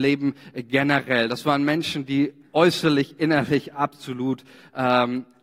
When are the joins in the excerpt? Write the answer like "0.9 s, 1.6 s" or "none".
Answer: none